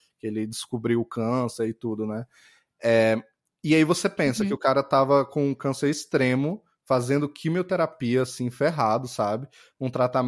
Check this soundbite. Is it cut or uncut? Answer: uncut